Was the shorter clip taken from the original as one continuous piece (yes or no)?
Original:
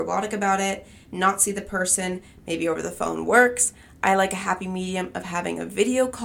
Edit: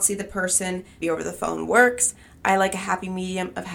no